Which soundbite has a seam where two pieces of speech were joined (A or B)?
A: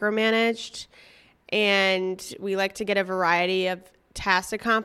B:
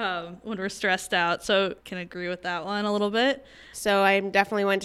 B